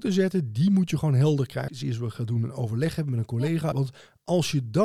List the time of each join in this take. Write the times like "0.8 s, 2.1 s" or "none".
1.7 s, 3.7 s